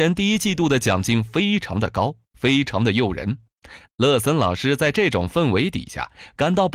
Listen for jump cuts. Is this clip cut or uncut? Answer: cut